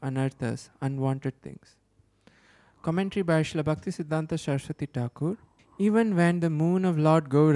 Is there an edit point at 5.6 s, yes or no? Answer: yes